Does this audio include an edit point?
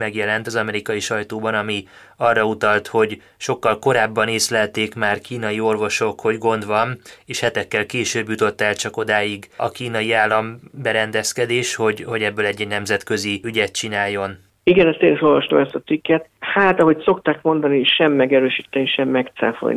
no; 0 cuts

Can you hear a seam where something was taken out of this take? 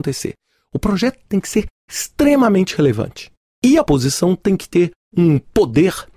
no; 0 cuts

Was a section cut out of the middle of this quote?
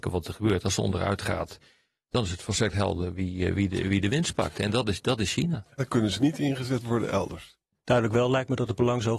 yes; 2 cuts; at 5.8 s, 7.8 s

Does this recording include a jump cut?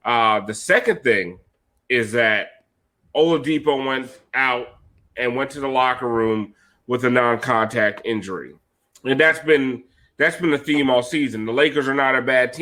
yes; 1 cut; at 8.9 s

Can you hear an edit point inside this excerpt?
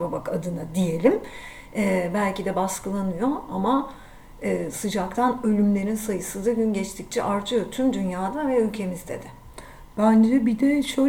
no; 0 cuts

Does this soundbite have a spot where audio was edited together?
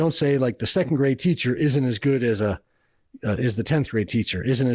no; 0 cuts

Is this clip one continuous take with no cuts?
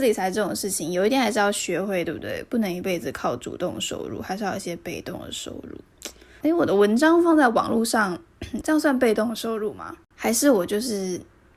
no; 2 cuts; at 6.4 s, 8.6 s

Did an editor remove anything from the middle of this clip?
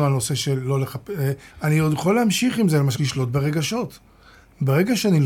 yes; 2 cuts; at 1.5 s, 2.9 s

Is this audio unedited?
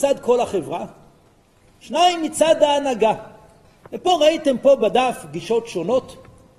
no; 1 cut; at 3.8 s

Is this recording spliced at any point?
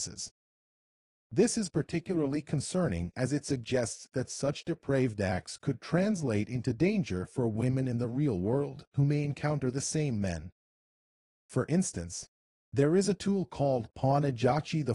yes; 2 cuts; at 1.1 s, 11.3 s

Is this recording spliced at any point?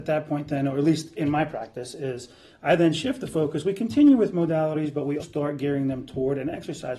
yes; 1 cut; at 5.2 s

